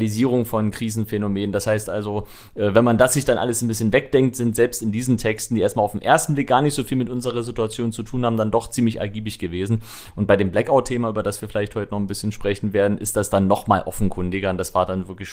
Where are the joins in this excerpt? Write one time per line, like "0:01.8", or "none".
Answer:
none